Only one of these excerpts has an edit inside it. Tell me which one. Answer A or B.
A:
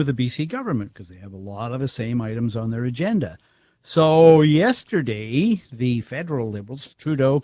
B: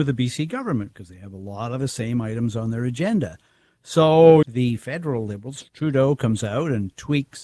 B